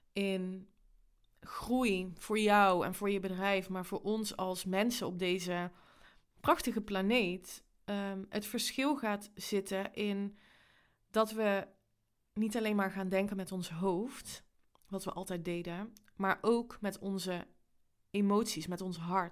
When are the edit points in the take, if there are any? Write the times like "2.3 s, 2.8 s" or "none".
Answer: none